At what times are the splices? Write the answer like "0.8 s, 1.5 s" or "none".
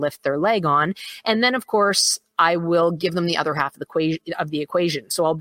none

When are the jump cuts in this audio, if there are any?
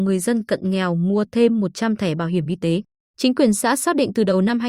3.1 s

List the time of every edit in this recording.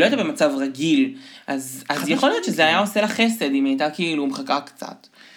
none

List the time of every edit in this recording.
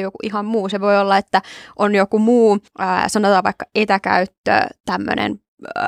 2.7 s

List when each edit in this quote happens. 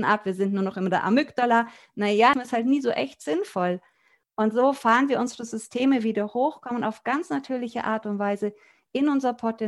2.3 s

